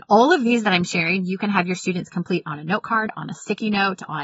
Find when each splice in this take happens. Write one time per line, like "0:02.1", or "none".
none